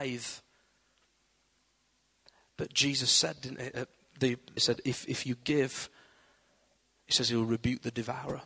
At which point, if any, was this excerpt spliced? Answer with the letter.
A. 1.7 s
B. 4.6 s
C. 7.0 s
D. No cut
B